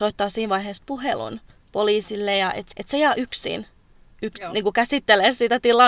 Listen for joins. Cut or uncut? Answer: cut